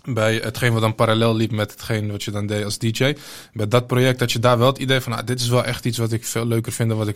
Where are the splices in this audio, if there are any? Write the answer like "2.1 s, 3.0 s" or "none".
none